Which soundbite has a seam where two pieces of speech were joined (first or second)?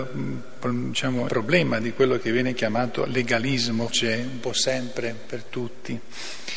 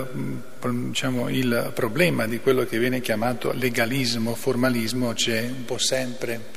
first